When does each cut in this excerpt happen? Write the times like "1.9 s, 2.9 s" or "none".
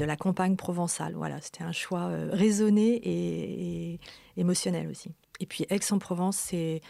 5.3 s